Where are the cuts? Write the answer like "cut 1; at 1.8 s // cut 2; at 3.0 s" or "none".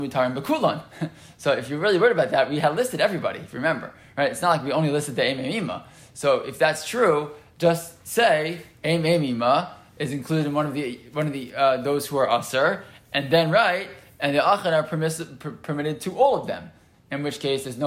none